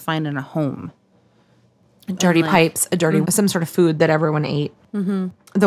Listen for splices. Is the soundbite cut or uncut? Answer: cut